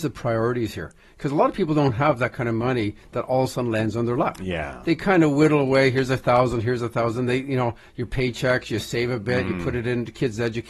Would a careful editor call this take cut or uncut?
uncut